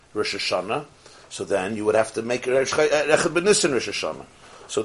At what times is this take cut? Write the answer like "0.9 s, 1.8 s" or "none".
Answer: none